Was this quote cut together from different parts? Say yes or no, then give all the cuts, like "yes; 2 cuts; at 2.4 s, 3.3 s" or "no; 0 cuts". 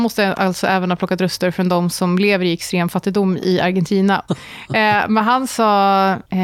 yes; 1 cut; at 4.3 s